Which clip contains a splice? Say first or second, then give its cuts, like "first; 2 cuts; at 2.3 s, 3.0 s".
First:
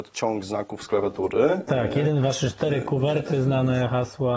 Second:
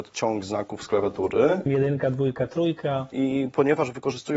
second; 2 cuts; at 1.7 s, 3.1 s